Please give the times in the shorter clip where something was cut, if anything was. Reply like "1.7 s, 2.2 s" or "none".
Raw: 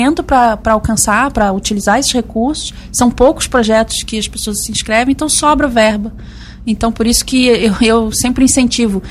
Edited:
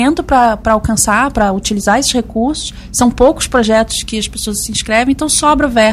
none

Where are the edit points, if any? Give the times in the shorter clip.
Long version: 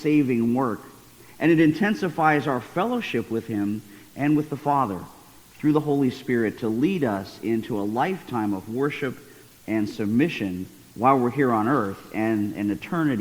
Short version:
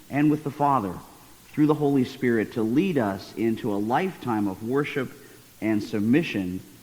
none

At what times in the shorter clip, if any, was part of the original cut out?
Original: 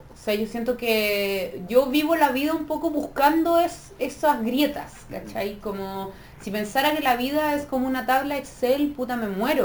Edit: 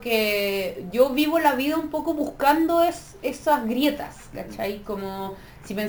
none

